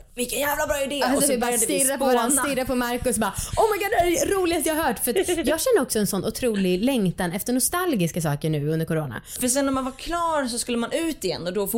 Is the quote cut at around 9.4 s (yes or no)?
yes